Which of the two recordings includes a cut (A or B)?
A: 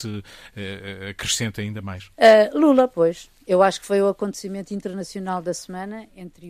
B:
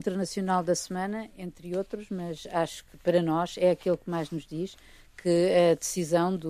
A